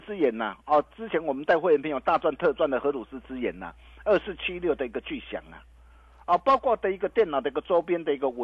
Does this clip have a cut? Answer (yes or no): no